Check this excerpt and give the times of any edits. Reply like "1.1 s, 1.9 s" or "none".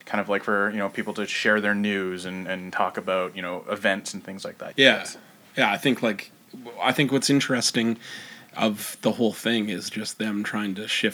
4.7 s